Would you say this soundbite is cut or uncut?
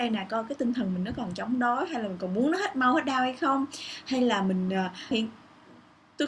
cut